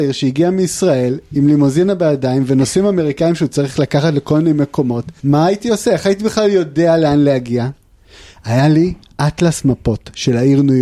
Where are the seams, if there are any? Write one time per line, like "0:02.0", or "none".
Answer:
0:05.2